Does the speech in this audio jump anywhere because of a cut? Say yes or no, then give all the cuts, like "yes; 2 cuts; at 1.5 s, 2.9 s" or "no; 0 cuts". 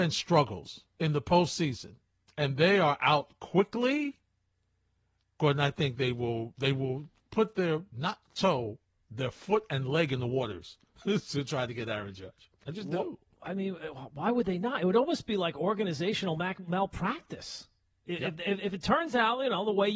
no; 0 cuts